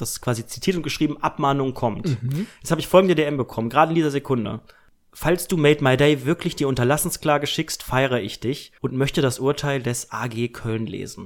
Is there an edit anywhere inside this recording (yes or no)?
yes